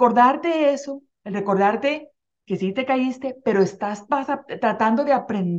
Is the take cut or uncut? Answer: uncut